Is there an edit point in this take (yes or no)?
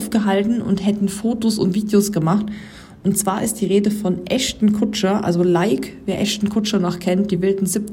no